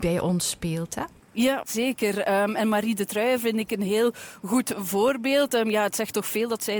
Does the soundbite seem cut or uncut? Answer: uncut